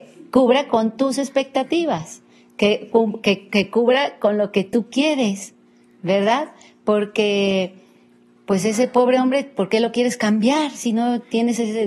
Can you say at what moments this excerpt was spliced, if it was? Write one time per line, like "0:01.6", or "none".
none